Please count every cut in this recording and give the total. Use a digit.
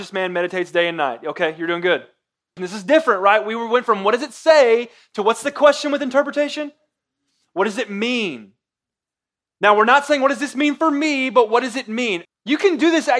2